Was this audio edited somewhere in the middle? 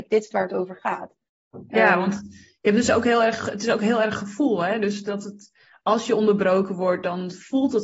no; 0 cuts

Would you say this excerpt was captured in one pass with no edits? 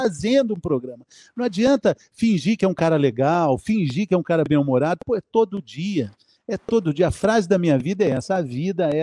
yes; 0 cuts

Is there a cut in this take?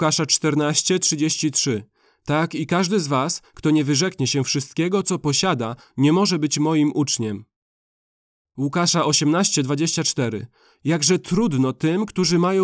no; 0 cuts

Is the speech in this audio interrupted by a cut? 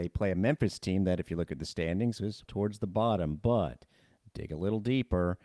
yes; 1 cut; at 2.5 s

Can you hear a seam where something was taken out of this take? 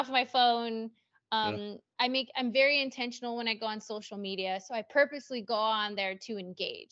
no; 0 cuts

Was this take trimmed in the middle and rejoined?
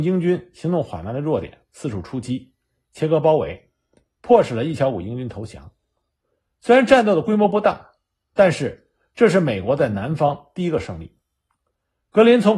no; 0 cuts

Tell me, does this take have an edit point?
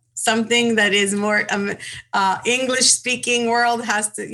no; 0 cuts

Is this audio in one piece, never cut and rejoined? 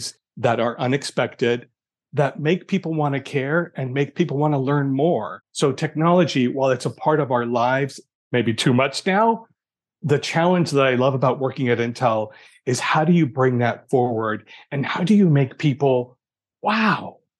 yes; 0 cuts

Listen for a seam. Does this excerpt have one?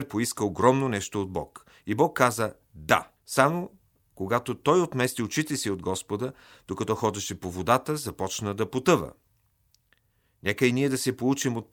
yes; 1 cut; at 3.2 s

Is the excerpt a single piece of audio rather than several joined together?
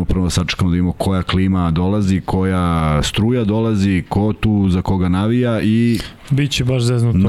yes; 0 cuts

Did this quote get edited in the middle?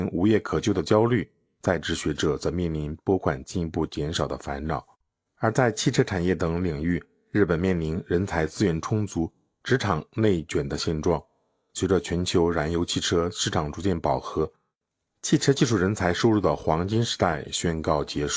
no; 0 cuts

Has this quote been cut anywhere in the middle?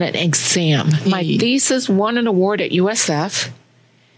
yes; 1 cut; at 1.1 s

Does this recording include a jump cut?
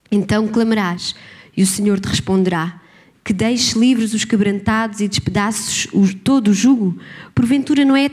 yes; 1 cut; at 3.1 s

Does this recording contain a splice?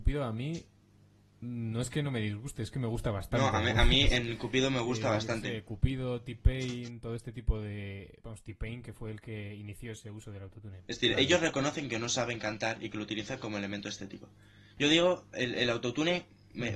no; 0 cuts

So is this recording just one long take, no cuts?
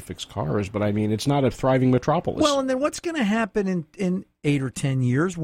yes; 0 cuts

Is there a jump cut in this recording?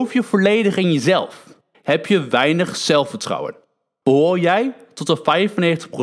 yes; 2 cuts; at 1.7 s, 4.0 s

